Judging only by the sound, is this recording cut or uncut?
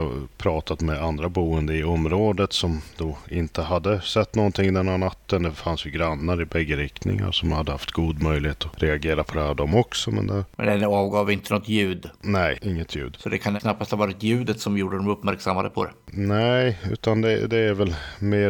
uncut